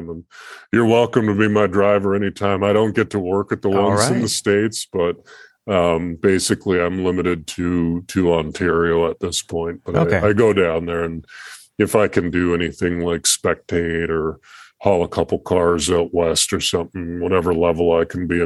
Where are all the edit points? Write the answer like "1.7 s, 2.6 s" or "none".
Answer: none

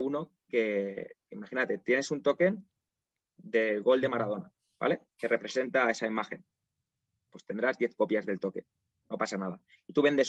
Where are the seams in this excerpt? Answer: 7.3 s

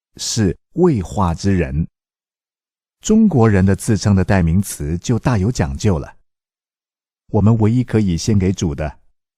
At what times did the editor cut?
7.2 s

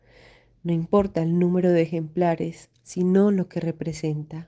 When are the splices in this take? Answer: 2.7 s

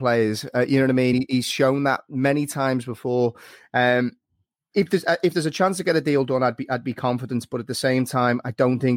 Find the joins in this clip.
none

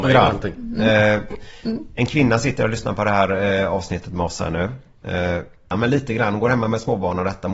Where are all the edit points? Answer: 5.7 s

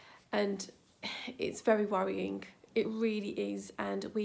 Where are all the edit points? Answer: none

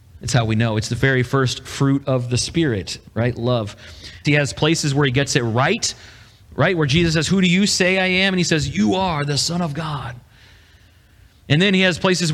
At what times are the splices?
3.1 s, 4.2 s

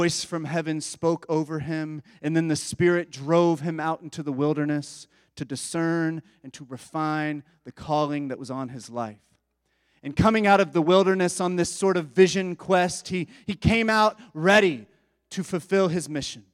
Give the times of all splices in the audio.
none

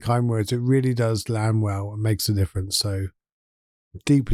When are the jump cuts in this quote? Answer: none

